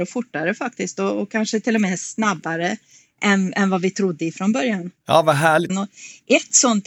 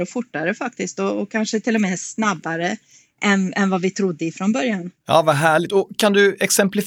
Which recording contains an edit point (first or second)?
first